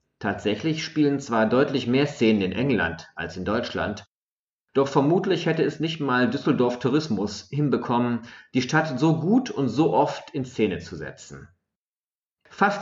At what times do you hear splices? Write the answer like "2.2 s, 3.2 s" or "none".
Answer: none